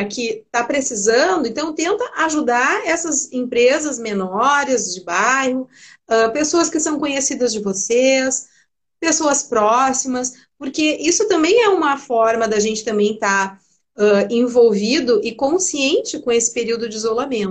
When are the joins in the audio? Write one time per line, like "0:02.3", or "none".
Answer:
none